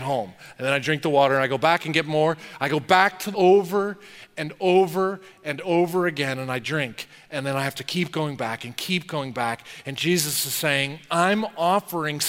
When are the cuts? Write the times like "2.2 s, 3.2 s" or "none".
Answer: 3.3 s

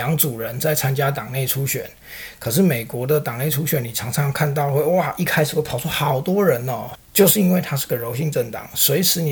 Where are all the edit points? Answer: 6.9 s

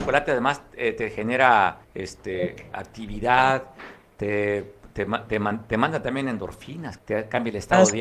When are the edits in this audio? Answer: 1.8 s, 7.0 s

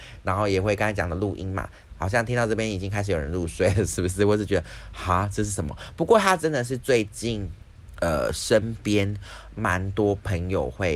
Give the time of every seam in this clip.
1.9 s

